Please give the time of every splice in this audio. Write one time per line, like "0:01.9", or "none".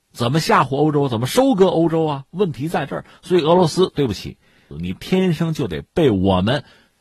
0:04.7